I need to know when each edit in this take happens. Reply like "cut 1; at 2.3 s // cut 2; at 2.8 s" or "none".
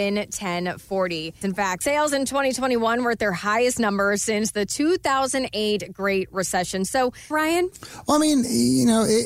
cut 1; at 1.4 s // cut 2; at 7.3 s